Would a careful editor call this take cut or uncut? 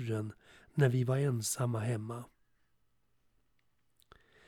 uncut